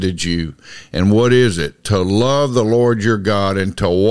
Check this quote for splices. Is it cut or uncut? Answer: uncut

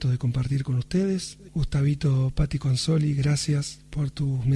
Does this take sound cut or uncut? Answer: cut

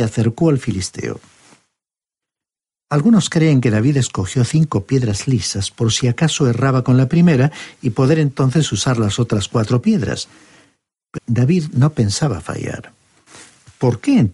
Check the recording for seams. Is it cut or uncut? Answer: cut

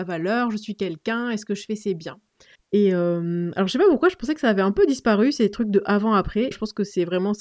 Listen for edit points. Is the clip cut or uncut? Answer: cut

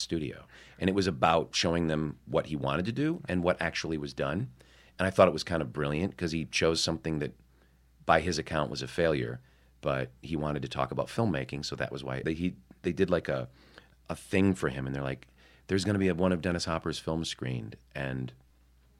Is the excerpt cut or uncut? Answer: cut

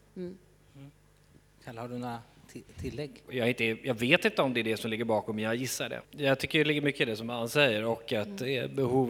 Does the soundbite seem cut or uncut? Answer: cut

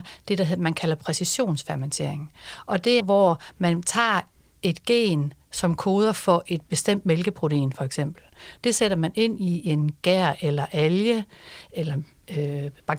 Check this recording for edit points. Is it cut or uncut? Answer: cut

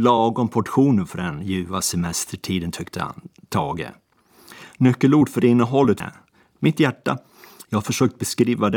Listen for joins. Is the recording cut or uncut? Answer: cut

